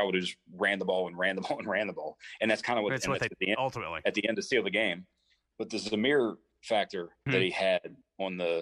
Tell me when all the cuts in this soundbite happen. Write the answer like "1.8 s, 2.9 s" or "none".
3.3 s, 7.3 s